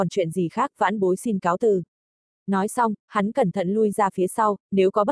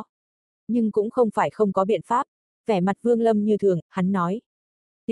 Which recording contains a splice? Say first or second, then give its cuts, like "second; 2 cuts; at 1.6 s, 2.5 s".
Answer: second; 2 cuts; at 2.5 s, 3.8 s